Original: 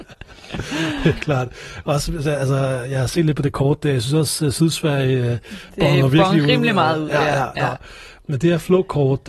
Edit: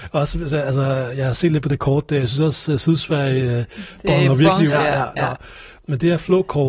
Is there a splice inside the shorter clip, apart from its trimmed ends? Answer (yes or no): yes